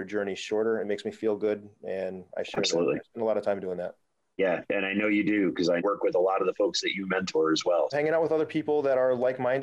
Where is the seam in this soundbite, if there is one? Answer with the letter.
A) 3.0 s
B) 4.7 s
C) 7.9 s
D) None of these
C